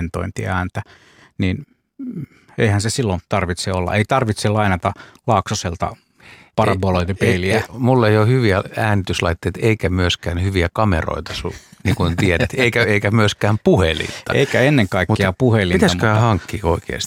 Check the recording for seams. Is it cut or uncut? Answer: uncut